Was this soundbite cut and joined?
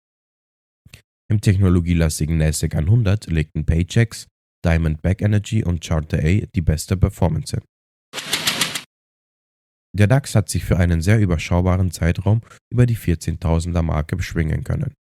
no; 0 cuts

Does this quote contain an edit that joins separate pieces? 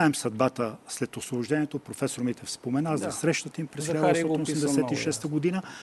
no; 0 cuts

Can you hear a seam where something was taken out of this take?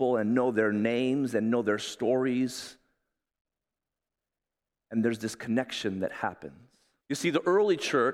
yes; 1 cut; at 7.0 s

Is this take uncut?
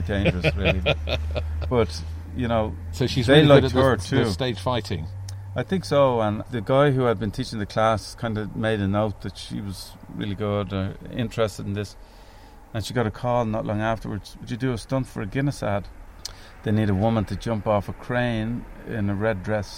yes; 0 cuts

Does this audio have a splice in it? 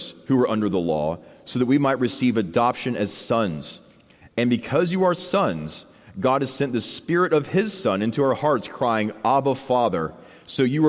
no; 0 cuts

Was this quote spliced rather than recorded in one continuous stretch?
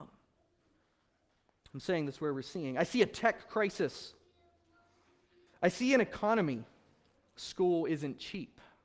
yes; 1 cut; at 5.5 s

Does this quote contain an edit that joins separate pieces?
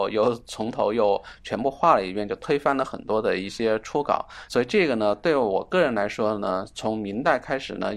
yes; 1 cut; at 4.5 s

